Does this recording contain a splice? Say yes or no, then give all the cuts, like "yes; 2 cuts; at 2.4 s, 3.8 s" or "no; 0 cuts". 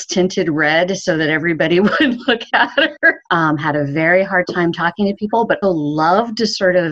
yes; 2 cuts; at 3.3 s, 5.6 s